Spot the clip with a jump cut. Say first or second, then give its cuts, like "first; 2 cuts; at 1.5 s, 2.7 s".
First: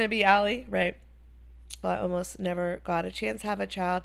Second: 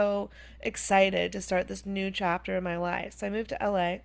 first; 1 cut; at 1.8 s